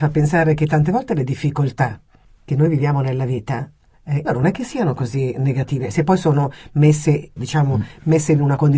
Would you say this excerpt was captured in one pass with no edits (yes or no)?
no